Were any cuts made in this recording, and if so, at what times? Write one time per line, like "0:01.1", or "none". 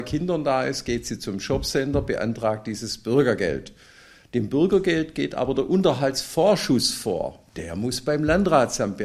none